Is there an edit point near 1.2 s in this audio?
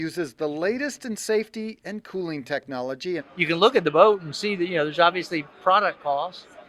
no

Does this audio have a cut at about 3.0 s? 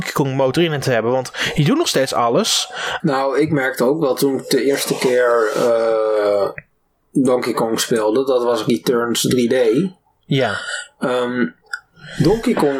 yes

